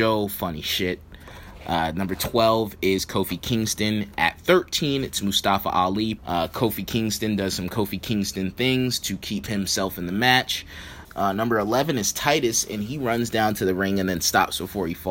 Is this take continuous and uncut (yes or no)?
no